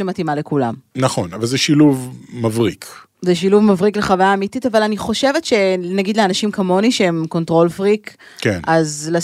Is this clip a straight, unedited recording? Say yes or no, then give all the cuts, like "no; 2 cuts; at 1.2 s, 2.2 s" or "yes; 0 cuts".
yes; 0 cuts